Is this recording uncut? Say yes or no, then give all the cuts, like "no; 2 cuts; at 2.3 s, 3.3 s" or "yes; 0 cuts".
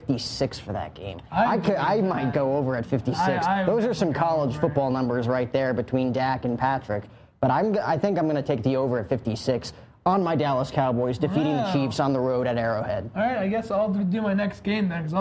yes; 0 cuts